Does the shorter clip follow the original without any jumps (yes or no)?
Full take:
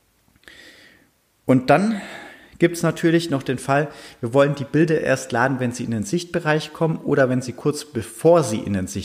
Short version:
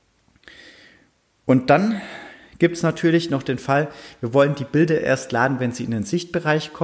yes